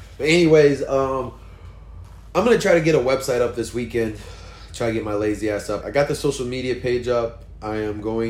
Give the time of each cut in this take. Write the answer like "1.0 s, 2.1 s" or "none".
5.8 s